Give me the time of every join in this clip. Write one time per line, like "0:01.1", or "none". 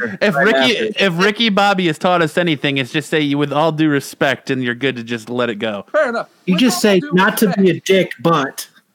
0:05.9